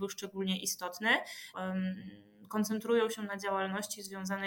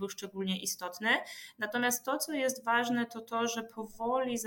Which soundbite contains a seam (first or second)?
first